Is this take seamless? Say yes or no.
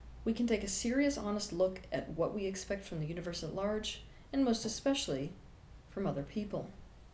yes